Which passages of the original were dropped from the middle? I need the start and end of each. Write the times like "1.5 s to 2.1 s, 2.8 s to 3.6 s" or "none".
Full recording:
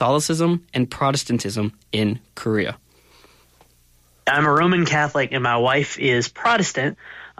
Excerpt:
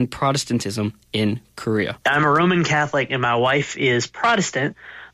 2.8 s to 4.2 s

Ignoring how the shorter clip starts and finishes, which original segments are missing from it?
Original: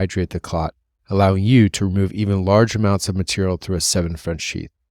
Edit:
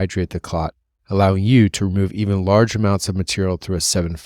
none

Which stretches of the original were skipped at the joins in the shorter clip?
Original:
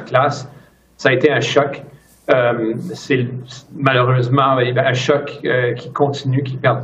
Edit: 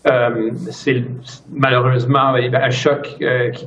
none

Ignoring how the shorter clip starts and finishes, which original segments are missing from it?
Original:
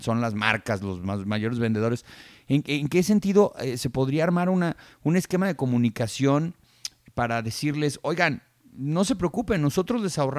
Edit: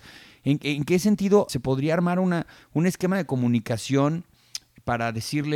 3.5 s to 3.8 s

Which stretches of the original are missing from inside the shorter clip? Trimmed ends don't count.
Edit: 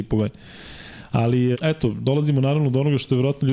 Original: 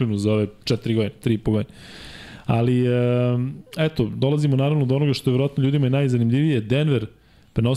2.9 s to 3.7 s

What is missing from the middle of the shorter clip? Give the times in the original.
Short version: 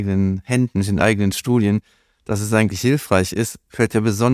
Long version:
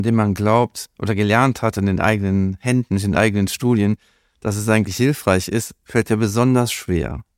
none

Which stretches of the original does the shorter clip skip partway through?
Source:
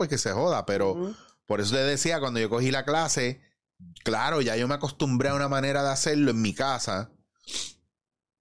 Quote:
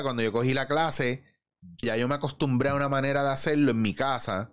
4.0 s to 4.4 s

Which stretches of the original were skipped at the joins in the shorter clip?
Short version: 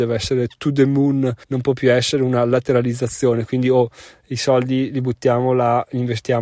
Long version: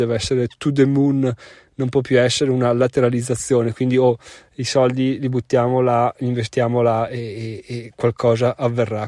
1.4 s to 1.7 s

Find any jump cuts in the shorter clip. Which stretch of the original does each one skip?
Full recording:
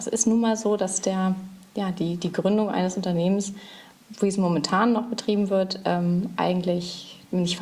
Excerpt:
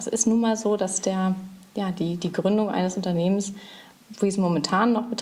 none

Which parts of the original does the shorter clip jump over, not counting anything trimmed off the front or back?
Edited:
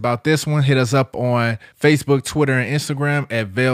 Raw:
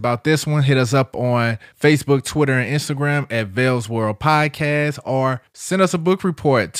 none

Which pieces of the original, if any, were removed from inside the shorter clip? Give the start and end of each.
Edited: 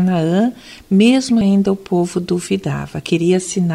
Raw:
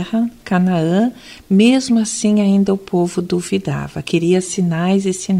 2.0 s to 2.4 s

